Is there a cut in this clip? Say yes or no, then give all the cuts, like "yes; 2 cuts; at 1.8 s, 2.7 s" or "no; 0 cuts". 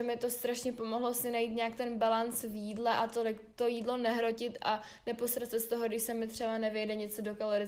no; 0 cuts